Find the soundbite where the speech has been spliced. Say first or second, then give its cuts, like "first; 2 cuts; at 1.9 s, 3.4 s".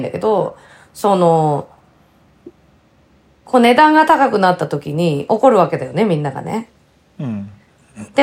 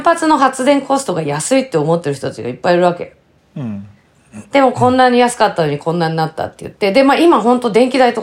second; 1 cut; at 3.4 s